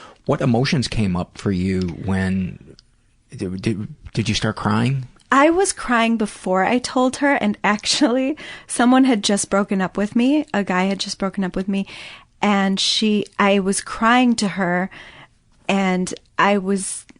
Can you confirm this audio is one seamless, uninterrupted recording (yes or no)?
yes